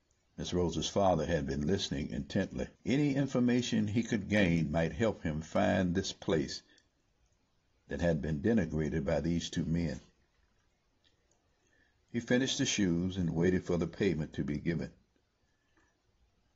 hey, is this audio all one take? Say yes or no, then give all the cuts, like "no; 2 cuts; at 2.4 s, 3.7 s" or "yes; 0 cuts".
no; 2 cuts; at 2.7 s, 12.0 s